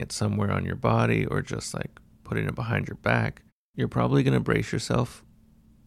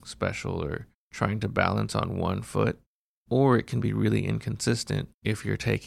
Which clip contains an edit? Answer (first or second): first